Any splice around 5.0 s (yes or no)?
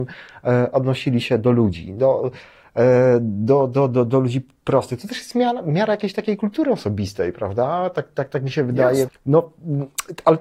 no